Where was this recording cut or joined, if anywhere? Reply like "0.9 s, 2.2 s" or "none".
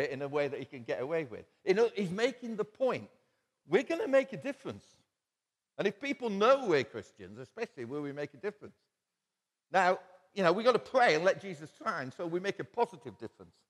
none